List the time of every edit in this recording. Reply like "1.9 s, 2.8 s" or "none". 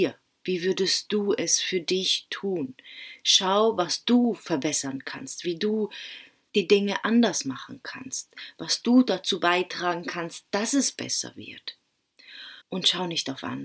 12.6 s